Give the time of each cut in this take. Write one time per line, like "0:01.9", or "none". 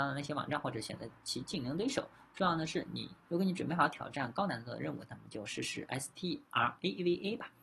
0:03.2